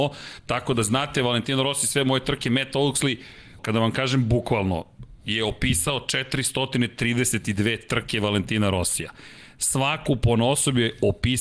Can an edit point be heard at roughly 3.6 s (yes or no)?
yes